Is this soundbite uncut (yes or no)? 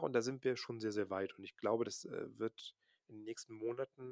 yes